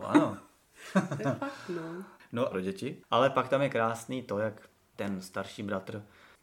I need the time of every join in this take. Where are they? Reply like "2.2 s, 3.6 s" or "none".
2.5 s